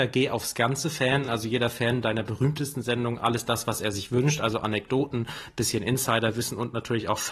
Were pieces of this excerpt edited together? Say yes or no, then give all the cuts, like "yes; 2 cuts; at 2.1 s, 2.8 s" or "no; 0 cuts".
no; 0 cuts